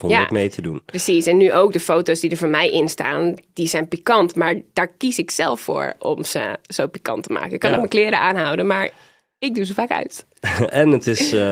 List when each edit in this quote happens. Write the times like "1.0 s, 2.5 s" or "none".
none